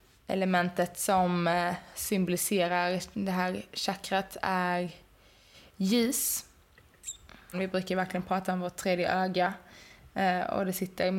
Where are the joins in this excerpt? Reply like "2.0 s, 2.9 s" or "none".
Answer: 7.5 s